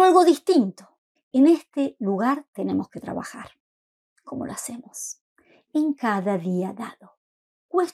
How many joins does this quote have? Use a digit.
1